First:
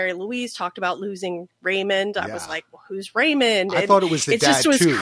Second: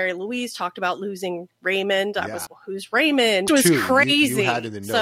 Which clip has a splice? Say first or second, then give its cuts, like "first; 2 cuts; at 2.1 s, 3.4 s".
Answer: second; 2 cuts; at 2.5 s, 3.5 s